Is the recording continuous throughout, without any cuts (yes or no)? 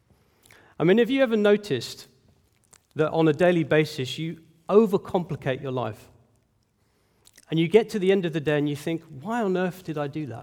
yes